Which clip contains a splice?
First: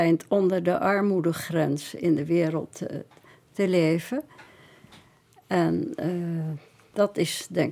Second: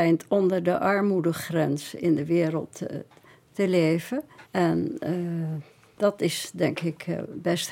second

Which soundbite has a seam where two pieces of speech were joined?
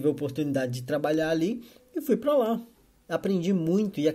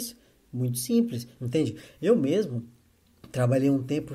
second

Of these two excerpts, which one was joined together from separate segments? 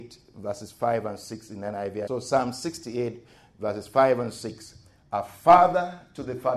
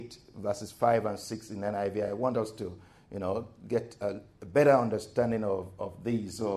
first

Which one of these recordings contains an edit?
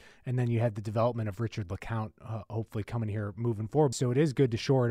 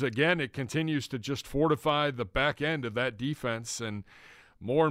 first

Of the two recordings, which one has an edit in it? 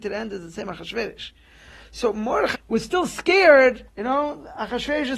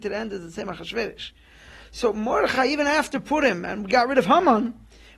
first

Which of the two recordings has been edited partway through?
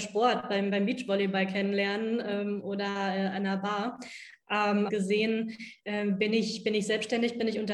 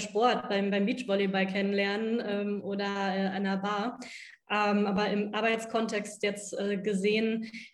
first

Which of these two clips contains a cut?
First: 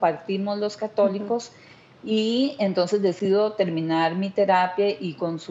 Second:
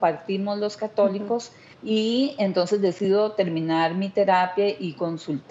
second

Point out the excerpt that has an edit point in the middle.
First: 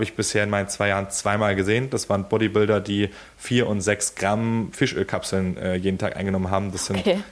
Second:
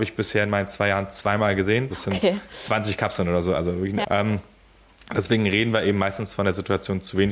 second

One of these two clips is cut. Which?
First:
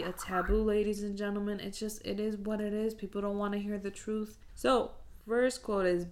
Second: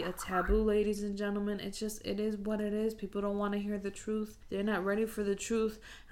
first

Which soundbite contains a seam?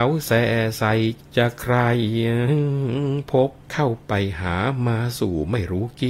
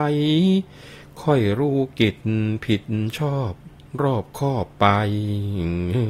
first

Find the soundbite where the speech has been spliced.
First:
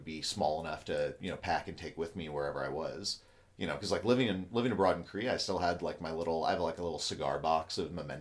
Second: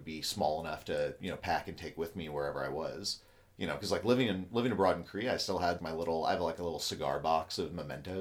second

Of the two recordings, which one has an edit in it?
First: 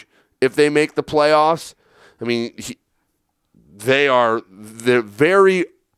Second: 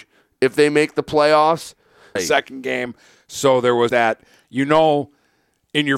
second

